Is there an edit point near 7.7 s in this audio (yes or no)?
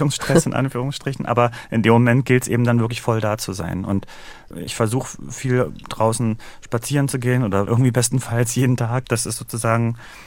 yes